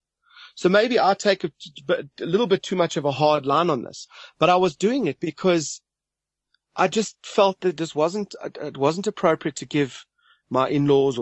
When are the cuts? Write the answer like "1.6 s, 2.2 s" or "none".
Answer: none